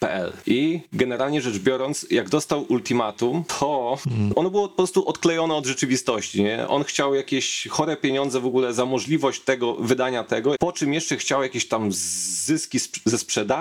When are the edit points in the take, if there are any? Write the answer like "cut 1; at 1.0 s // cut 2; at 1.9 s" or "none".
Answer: cut 1; at 4.3 s // cut 2; at 10.6 s